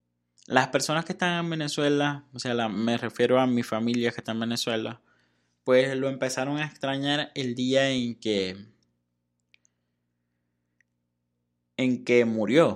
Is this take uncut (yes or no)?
yes